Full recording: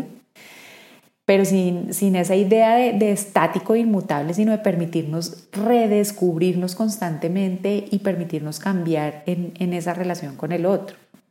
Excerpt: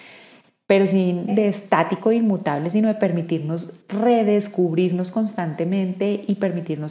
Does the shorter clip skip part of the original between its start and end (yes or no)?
yes